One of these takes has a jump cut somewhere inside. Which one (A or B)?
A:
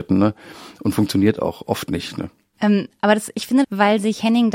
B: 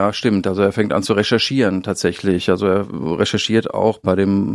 A